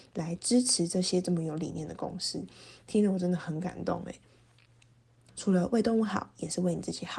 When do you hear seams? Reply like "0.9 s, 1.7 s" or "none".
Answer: 5.3 s